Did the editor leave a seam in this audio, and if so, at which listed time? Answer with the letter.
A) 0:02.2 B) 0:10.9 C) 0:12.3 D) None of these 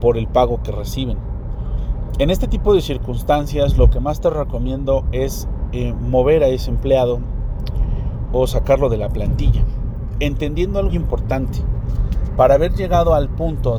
B